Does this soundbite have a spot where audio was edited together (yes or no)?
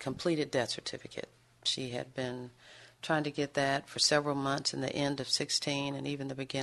no